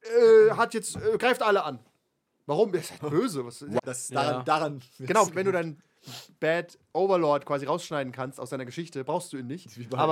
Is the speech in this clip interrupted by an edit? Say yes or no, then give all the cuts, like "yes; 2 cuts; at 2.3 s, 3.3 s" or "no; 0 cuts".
yes; 2 cuts; at 3.8 s, 5.3 s